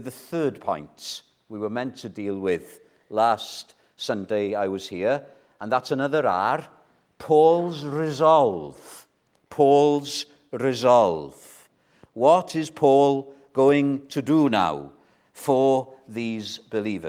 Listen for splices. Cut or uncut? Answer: uncut